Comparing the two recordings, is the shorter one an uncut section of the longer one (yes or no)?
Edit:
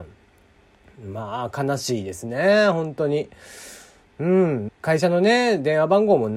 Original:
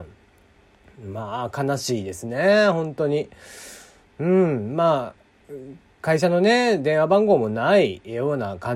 no